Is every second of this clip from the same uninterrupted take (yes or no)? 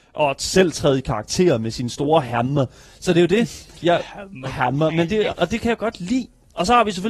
no